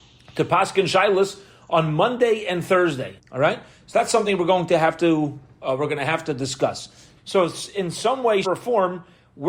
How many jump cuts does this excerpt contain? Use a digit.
3